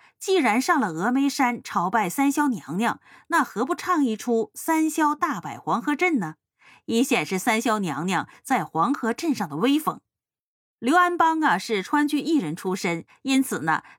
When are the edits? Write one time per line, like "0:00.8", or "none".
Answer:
0:10.6
0:13.1